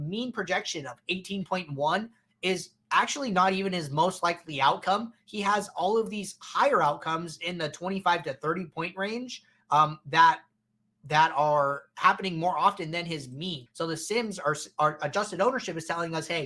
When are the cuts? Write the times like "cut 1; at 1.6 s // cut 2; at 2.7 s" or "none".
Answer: cut 1; at 13.7 s

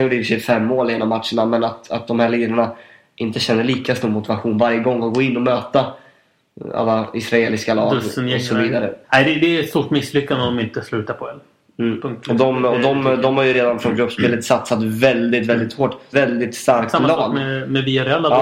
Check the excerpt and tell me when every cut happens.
cut 1; at 9.0 s // cut 2; at 16.1 s

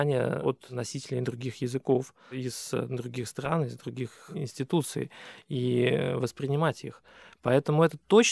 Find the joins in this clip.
none

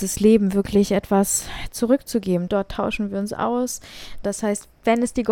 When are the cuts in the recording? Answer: cut 1; at 2.5 s // cut 2; at 4.2 s

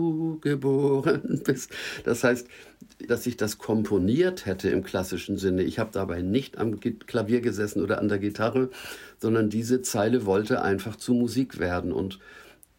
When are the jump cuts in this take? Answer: cut 1; at 3.1 s

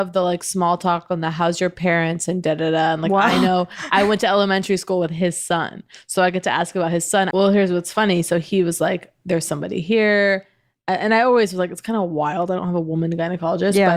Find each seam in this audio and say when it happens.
cut 1; at 7.3 s

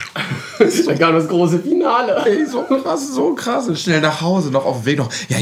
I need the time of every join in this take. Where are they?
none

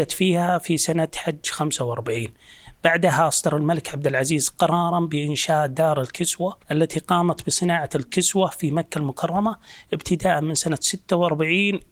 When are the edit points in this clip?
cut 1; at 6.6 s

